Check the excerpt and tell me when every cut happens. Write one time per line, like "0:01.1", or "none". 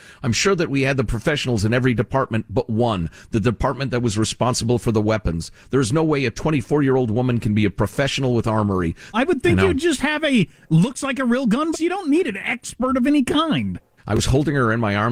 0:09.1
0:11.7
0:14.0